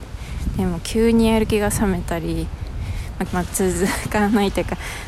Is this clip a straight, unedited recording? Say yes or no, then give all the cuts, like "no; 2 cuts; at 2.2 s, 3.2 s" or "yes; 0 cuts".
no; 1 cut; at 3.3 s